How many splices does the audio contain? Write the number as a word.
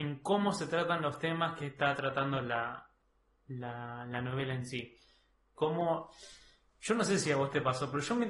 one